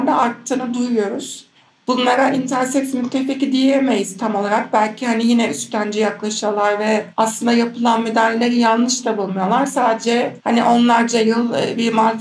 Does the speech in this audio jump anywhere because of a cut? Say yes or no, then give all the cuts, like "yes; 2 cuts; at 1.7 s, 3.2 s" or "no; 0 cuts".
no; 0 cuts